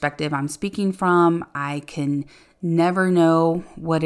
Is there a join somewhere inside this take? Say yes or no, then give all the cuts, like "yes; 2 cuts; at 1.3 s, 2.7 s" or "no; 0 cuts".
no; 0 cuts